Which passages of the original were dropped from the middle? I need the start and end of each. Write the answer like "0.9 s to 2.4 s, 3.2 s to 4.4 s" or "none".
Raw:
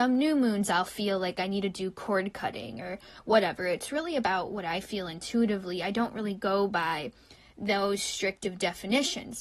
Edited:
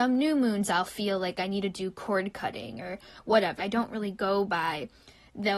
3.6 s to 5.8 s